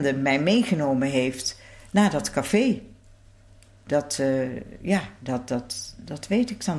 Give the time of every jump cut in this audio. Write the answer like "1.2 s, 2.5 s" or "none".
none